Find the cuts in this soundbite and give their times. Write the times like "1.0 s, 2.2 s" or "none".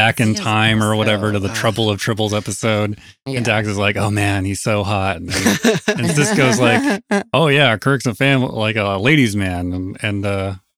none